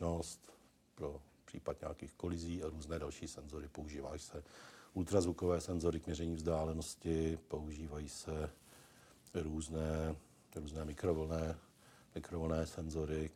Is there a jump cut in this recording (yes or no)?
no